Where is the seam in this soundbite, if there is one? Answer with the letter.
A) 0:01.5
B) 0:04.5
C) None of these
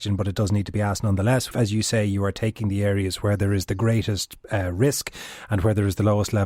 A